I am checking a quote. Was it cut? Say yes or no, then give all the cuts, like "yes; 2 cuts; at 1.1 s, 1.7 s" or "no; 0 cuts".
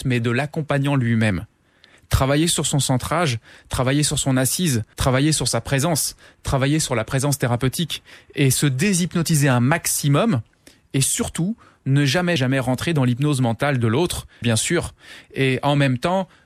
yes; 3 cuts; at 4.9 s, 12.4 s, 14.4 s